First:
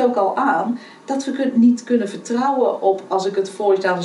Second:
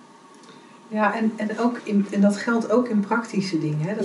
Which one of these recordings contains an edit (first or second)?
second